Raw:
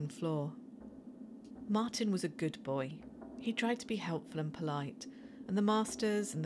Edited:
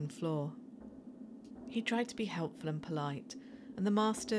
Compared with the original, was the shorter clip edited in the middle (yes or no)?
yes